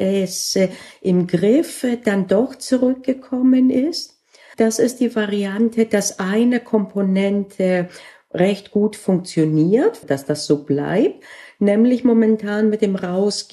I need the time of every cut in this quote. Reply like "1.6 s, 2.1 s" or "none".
4.5 s, 10.0 s